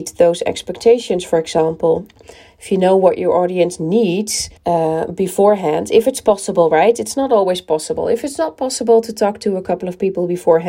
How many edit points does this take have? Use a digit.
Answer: 1